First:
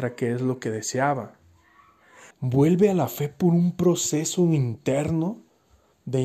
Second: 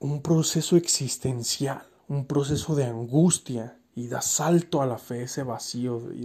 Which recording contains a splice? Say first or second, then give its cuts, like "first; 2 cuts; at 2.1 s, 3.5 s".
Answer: first; 1 cut; at 2.3 s